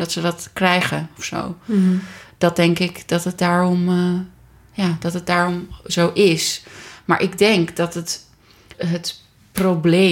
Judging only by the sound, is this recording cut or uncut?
cut